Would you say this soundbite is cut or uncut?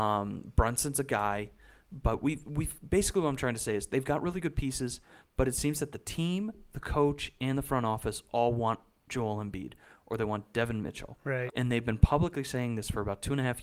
cut